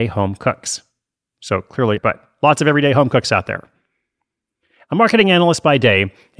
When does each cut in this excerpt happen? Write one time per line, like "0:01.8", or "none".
0:02.0